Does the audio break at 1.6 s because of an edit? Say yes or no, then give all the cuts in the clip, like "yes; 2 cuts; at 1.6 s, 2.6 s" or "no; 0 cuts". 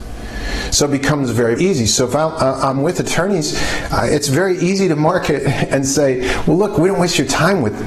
yes; 1 cut; at 1.6 s